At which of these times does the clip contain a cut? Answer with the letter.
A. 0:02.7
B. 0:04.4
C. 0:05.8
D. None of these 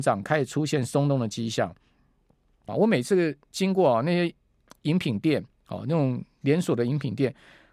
A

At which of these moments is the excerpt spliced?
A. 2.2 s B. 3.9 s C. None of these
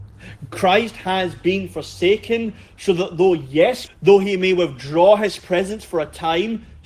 B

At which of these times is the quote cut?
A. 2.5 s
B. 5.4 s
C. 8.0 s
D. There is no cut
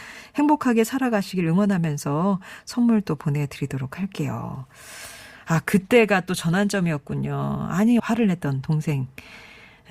C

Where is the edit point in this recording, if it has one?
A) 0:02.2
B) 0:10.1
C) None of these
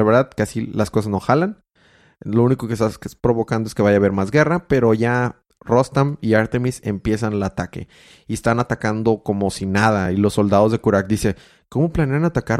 C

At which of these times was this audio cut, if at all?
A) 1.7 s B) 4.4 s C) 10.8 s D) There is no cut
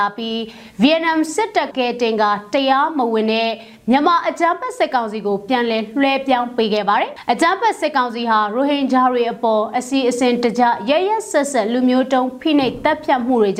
A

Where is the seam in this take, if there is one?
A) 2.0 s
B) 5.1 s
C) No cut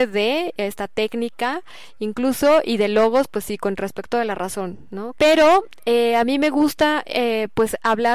B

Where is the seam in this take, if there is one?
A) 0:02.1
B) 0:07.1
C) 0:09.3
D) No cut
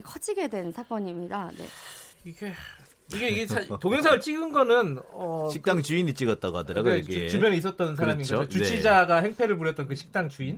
A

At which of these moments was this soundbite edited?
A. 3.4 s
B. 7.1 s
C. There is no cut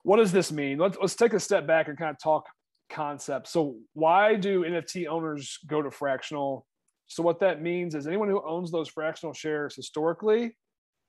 B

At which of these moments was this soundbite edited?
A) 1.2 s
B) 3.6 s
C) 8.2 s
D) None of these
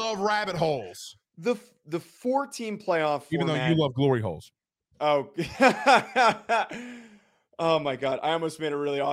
D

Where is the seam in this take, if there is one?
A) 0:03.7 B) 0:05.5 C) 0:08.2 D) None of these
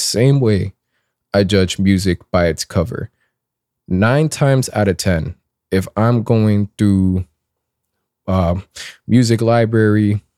D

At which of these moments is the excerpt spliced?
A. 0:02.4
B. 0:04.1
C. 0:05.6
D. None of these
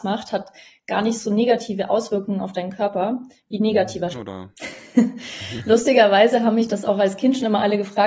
B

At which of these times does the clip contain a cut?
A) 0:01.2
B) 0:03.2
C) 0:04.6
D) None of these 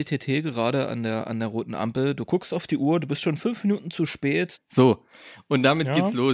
C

